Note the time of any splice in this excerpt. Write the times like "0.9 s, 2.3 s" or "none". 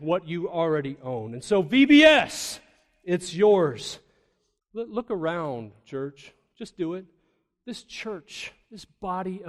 4.6 s